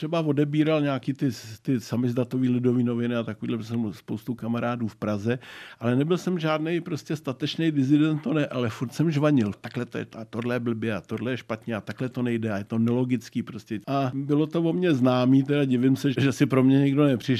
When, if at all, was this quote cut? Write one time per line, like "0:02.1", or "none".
0:09.5